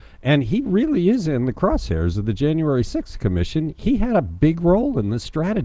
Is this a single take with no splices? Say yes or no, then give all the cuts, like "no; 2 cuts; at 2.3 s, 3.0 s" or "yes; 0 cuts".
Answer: yes; 0 cuts